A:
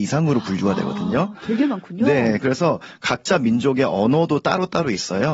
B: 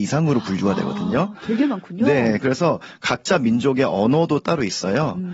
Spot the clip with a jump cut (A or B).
B